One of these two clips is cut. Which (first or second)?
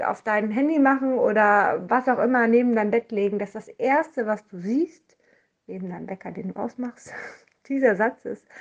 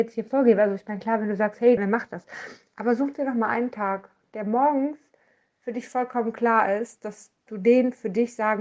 second